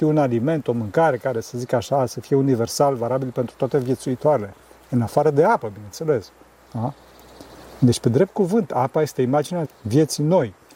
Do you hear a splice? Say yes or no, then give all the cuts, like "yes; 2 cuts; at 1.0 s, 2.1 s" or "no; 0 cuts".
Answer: yes; 1 cut; at 9.6 s